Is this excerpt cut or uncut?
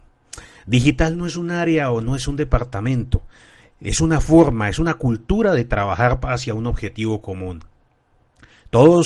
uncut